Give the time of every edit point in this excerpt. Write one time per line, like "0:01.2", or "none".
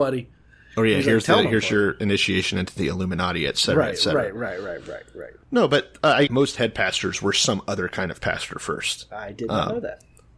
0:06.3